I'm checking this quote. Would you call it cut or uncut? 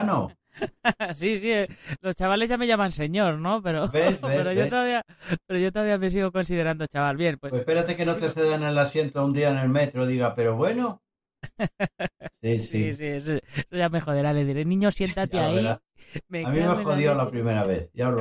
uncut